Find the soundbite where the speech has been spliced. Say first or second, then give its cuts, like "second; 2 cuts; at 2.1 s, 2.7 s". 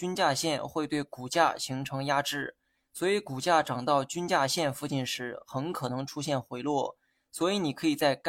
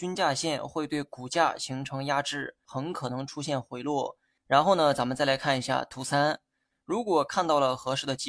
second; 3 cuts; at 2.7 s, 4.4 s, 6.7 s